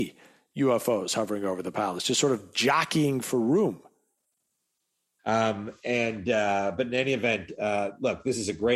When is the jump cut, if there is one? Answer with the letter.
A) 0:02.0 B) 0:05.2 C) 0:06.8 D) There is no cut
B